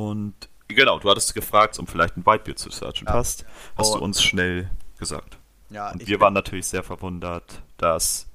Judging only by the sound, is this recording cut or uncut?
cut